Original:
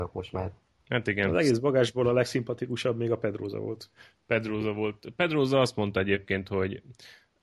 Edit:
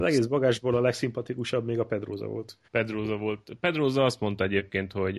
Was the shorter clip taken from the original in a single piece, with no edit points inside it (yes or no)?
no